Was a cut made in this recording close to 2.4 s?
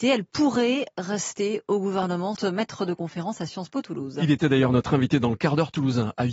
yes; 1 cut; at 2.4 s

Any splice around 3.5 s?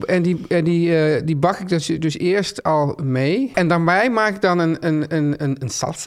yes; 1 cut; at 3.5 s

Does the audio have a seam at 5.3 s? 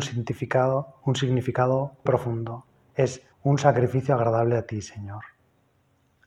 no; 2 cuts; at 2.1 s, 3.3 s

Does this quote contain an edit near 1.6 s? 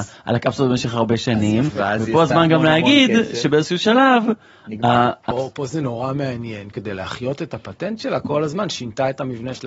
no; 2 cuts; at 5.3 s, 6.7 s

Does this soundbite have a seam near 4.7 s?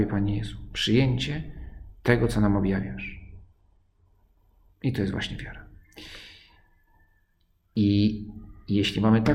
yes; 1 cut; at 4.7 s

